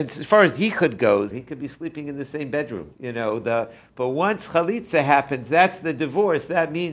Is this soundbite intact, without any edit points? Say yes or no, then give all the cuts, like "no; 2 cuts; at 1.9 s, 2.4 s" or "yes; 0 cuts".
no; 2 cuts; at 1.3 s, 2.9 s